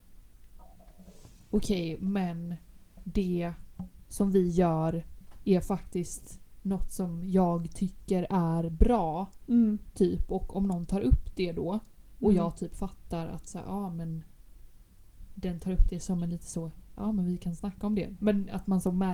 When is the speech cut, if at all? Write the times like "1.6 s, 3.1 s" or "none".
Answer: 17.0 s, 18.2 s